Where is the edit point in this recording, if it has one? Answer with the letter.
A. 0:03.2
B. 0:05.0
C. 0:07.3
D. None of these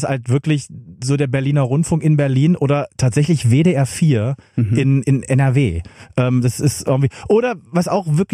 B